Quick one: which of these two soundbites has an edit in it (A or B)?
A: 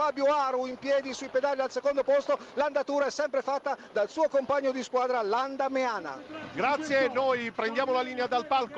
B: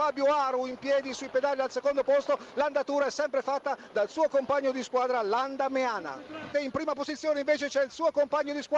B